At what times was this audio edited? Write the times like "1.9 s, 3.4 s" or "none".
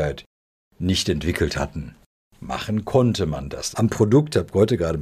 3.7 s